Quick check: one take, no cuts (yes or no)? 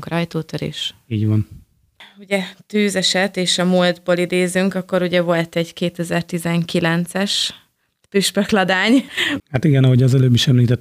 no